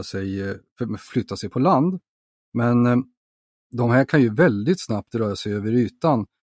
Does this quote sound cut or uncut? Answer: uncut